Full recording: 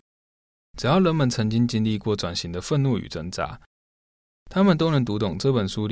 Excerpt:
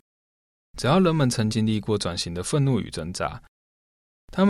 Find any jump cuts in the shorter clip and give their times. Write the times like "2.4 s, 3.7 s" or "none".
1.5 s